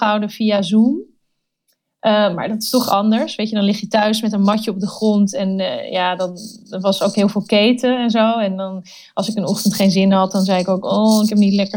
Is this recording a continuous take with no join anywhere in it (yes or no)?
yes